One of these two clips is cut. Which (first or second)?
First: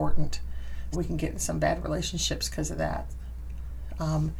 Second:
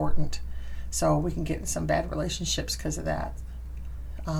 first